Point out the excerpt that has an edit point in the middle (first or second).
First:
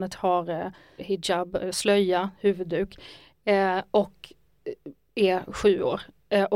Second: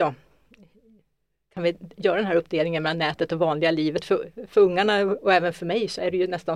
first